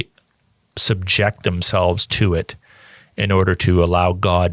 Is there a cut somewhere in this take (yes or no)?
no